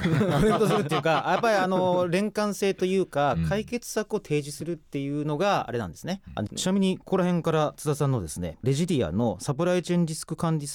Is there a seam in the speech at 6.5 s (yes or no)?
yes